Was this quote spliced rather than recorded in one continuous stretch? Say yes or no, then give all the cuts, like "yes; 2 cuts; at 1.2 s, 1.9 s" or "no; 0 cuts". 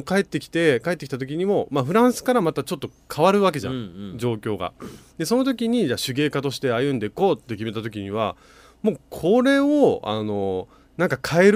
no; 0 cuts